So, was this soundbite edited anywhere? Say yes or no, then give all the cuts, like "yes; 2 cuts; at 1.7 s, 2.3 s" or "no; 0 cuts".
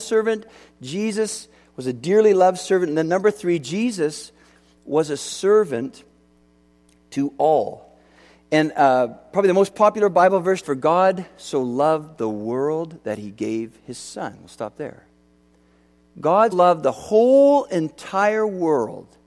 yes; 2 cuts; at 10.6 s, 16.5 s